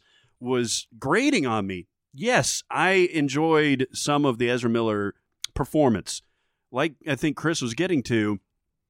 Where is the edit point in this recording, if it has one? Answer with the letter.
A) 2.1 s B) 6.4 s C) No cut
C